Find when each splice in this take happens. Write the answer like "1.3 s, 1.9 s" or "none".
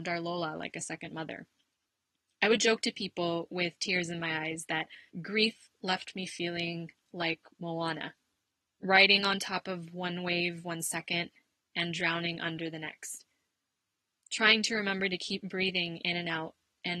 none